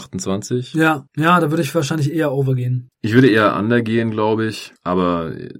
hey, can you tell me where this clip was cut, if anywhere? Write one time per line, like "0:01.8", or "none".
0:02.9